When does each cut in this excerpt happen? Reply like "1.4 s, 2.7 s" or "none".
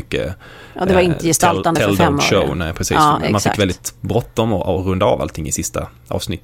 none